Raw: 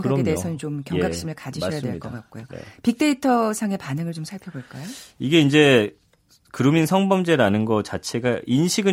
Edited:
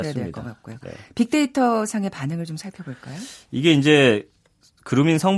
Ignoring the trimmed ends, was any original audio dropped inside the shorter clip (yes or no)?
no